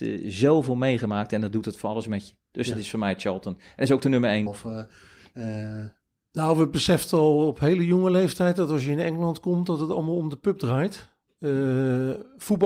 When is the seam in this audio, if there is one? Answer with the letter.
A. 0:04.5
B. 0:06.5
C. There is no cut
A